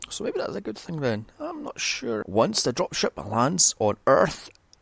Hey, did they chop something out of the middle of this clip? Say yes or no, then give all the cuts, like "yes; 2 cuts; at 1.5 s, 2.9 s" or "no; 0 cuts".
yes; 1 cut; at 2.2 s